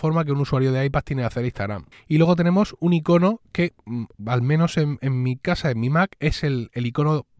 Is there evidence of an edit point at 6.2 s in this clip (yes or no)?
no